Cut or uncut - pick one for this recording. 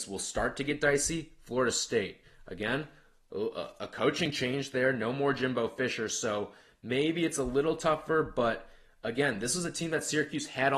uncut